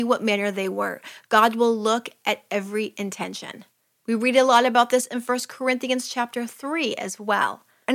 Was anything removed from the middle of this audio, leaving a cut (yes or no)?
no